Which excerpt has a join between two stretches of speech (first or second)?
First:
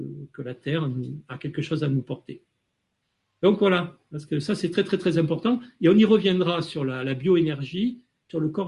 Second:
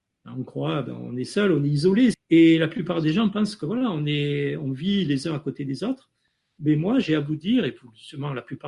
second